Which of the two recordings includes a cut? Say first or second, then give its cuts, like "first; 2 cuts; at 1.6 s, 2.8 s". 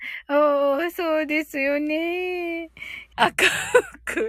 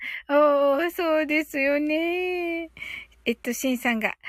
first; 1 cut; at 3.1 s